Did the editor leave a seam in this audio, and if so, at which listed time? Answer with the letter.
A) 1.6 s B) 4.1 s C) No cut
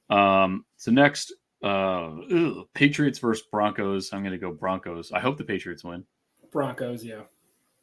C